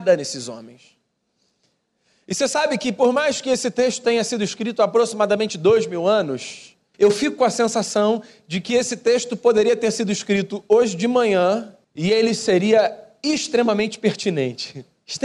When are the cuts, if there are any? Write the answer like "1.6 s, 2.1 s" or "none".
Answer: 6.9 s, 11.8 s